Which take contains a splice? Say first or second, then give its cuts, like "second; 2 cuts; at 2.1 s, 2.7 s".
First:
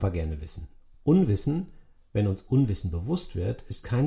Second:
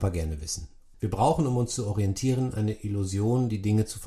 second; 1 cut; at 0.9 s